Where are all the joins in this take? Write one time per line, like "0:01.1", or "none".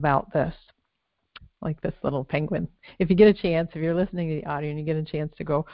0:01.4